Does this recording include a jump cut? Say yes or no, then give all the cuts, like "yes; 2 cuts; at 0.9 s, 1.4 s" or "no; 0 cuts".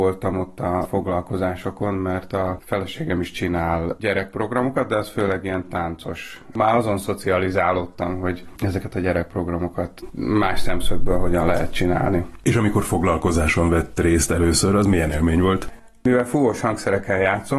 no; 0 cuts